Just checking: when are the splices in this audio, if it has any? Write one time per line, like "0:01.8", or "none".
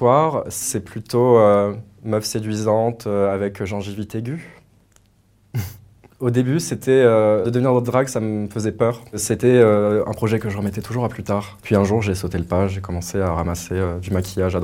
none

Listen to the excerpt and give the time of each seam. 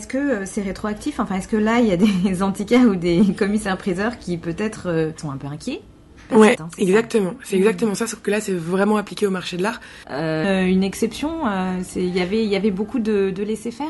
0:06.5
0:10.4

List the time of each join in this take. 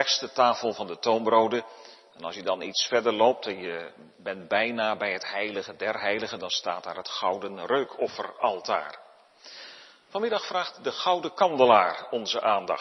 none

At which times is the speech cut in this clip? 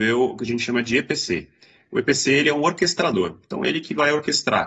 none

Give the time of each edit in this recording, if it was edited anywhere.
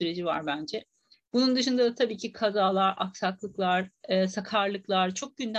none

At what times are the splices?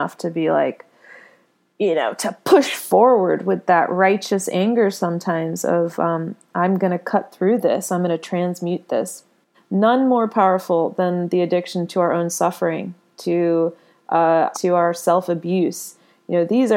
0:09.5
0:14.5

